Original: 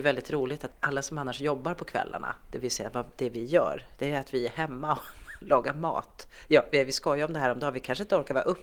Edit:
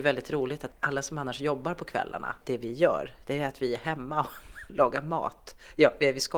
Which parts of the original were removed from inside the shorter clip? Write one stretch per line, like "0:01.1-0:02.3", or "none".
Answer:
0:02.4-0:03.1